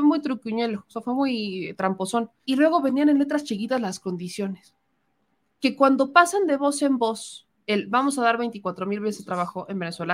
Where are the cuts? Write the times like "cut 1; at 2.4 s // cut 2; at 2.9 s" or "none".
cut 1; at 2.4 s